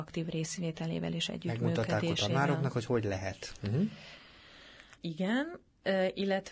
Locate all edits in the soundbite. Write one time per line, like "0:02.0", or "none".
0:05.0